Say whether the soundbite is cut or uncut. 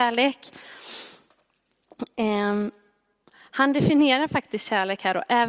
uncut